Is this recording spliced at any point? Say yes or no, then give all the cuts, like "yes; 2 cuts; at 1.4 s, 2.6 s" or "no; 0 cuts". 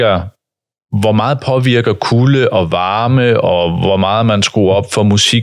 no; 0 cuts